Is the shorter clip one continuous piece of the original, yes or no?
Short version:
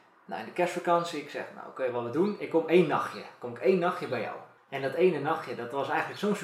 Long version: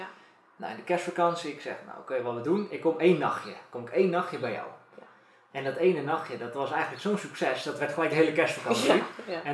no